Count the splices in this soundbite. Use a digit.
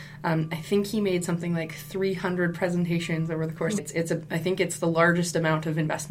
1